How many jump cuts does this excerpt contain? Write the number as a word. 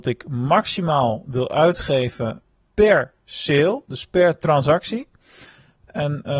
zero